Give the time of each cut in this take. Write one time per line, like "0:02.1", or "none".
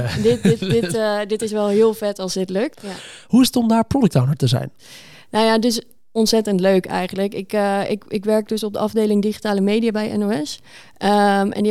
0:02.7